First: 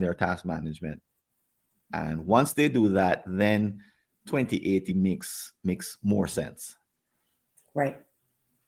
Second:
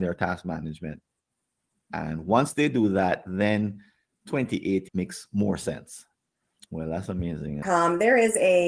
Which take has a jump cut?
second; 3 cuts; at 4.9 s, 6.6 s, 7.6 s

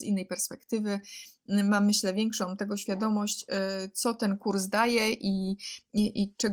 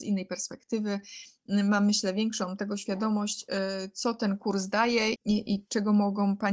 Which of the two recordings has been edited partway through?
second; 1 cut; at 5.2 s

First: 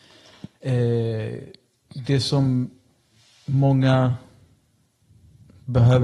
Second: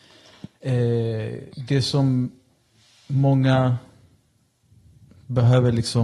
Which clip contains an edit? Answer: second; 1 cut; at 1.5 s

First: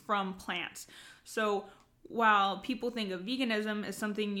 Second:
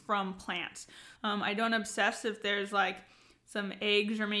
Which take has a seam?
second; 1 cut; at 1.2 s

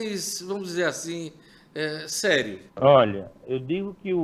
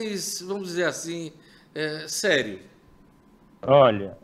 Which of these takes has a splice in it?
first; 1 cut; at 2.7 s

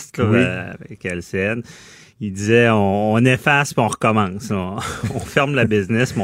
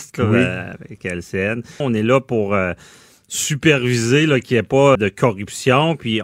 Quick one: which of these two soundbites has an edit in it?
second; 2 cuts; at 1.8 s, 5.0 s

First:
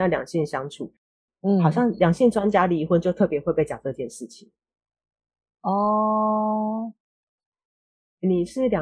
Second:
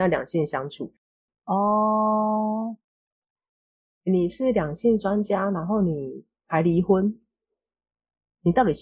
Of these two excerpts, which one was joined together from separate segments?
second; 1 cut; at 1.3 s

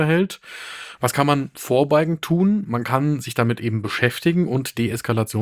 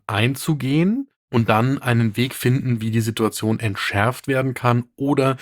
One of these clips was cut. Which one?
first; 1 cut; at 1.0 s

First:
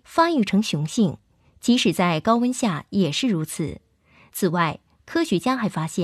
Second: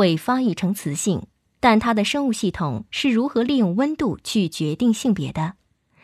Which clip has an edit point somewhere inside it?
second; 1 cut; at 1.6 s

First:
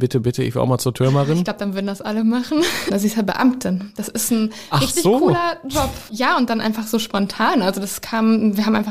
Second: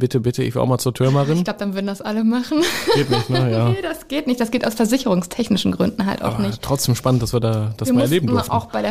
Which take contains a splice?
first; 2 cuts; at 2.9 s, 6.1 s

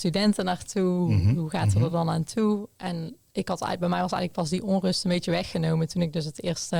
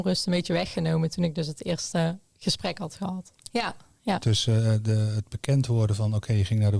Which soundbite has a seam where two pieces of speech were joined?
second; 1 cut; at 3.5 s

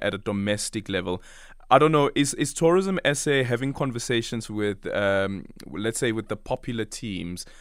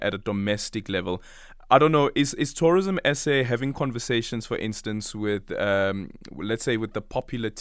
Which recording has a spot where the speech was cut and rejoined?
first; 1 cut; at 4.5 s

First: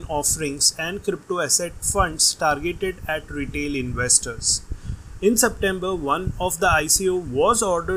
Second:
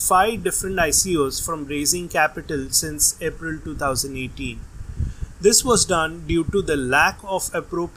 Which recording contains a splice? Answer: first; 1 cut; at 5.2 s

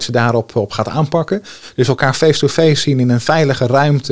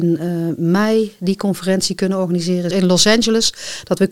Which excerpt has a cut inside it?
second; 1 cut; at 2.7 s

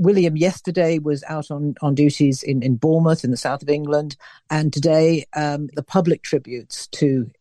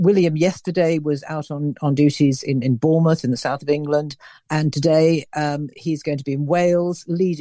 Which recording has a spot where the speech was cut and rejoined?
first; 1 cut; at 5.7 s

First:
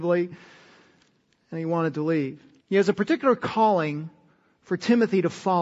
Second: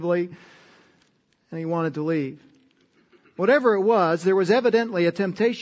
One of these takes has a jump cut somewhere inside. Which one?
first; 1 cut; at 2.6 s

